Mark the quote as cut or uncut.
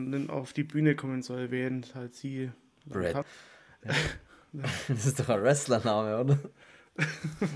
cut